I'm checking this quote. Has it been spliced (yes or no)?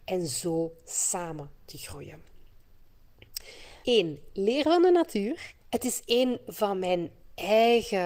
yes